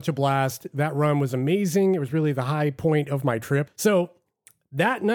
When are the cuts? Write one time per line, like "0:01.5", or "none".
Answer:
0:03.7